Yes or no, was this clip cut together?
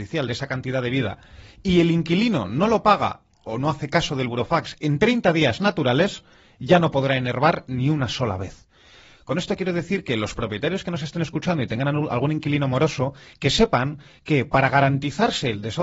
yes